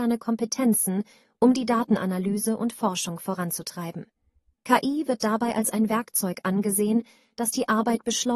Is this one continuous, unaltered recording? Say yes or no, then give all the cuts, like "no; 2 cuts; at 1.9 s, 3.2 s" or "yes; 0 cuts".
yes; 0 cuts